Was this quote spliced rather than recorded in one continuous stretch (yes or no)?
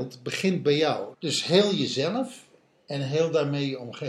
yes